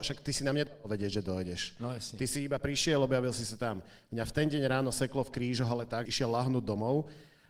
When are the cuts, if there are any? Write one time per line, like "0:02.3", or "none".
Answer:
0:06.1